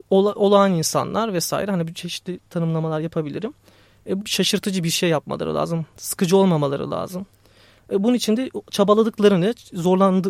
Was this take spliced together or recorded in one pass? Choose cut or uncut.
cut